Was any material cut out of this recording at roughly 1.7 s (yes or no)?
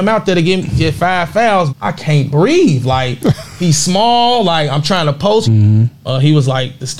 yes